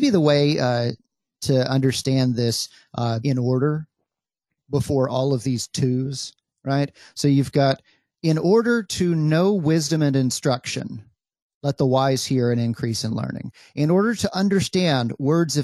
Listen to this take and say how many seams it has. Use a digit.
1